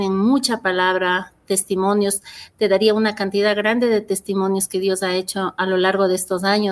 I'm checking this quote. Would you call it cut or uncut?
uncut